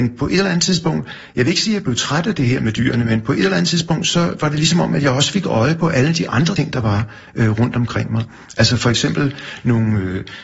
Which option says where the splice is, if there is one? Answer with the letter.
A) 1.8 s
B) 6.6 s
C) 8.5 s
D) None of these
B